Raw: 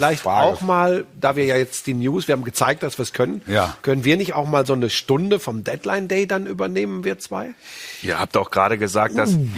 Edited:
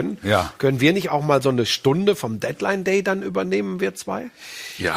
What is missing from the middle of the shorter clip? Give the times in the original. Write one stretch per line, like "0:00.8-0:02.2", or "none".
none